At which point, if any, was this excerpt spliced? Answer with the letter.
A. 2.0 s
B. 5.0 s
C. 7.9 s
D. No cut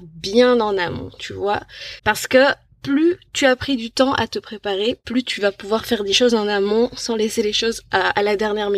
A